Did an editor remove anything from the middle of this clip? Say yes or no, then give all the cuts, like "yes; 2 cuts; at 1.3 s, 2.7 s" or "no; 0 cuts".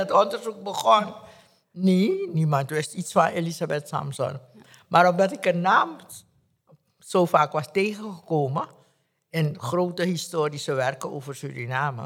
no; 0 cuts